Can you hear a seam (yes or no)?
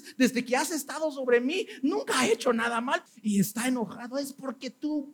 yes